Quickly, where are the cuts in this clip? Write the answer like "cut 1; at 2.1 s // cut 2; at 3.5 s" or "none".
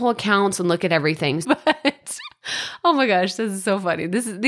cut 1; at 1.4 s